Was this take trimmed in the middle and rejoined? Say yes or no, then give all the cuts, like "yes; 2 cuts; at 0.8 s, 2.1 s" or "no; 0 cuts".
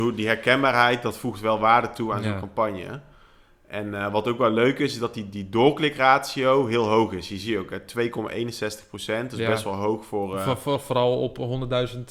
no; 0 cuts